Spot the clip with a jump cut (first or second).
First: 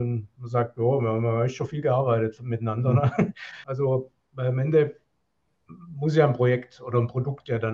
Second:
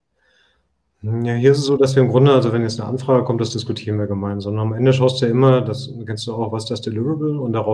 first